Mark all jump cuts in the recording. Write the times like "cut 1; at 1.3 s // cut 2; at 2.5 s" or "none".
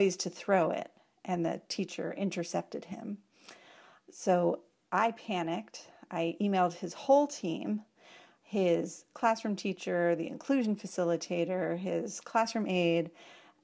none